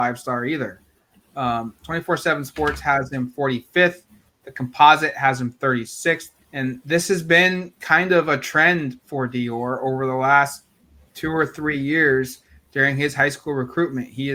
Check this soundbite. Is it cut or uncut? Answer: cut